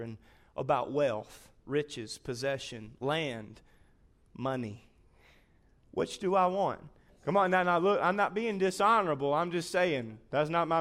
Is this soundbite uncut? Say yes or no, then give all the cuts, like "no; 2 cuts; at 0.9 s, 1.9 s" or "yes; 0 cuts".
no; 1 cut; at 7.1 s